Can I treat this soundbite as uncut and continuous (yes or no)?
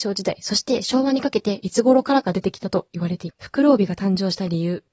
no